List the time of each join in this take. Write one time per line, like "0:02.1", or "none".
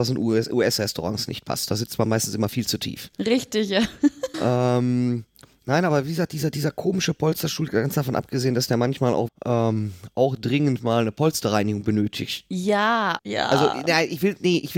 0:04.3
0:09.3
0:13.2